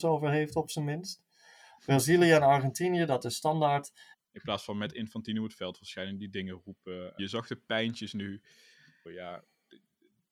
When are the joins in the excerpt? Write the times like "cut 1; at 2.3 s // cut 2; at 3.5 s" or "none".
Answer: cut 1; at 4.1 s // cut 2; at 7.2 s // cut 3; at 9.0 s